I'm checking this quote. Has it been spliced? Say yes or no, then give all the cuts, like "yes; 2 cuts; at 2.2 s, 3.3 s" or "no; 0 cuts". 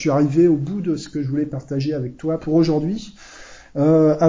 yes; 1 cut; at 2.4 s